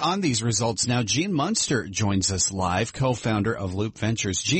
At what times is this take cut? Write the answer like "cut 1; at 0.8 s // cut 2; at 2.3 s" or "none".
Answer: none